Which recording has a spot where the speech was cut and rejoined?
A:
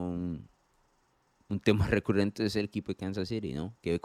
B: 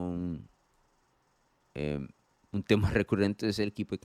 A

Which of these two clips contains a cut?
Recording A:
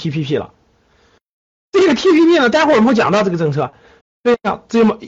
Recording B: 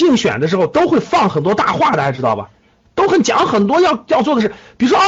A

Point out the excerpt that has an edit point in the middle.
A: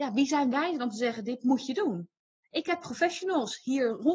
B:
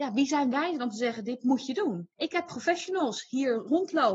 B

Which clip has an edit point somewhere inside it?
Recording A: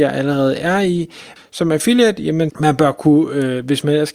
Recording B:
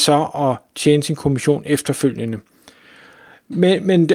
A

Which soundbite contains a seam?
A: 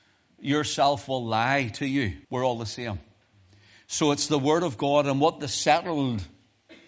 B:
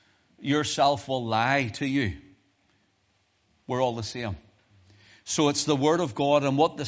A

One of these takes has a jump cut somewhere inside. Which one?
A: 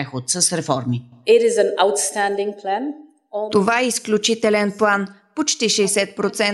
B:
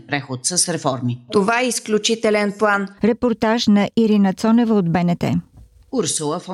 B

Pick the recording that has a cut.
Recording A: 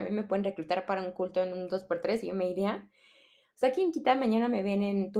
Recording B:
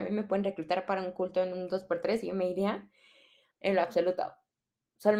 B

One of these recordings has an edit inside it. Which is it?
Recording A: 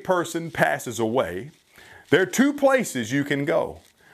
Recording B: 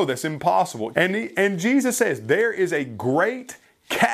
B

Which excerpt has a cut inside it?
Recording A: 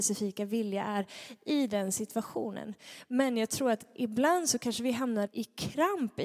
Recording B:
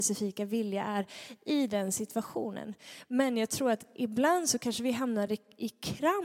A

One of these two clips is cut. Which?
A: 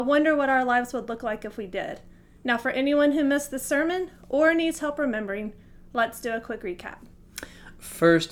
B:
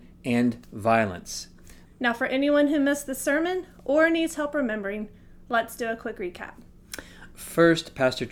B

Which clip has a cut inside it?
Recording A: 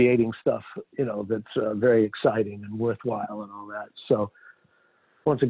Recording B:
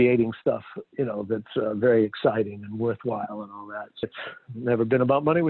B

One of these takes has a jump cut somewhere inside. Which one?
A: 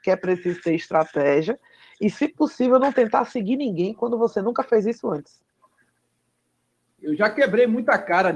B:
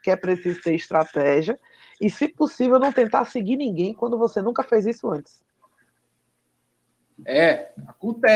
A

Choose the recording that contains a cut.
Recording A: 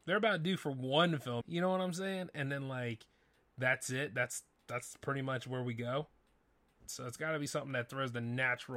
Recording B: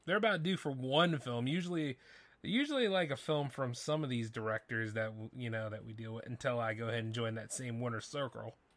A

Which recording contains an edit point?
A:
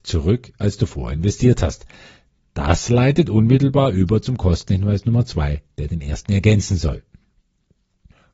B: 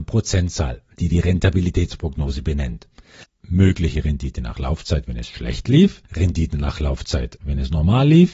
B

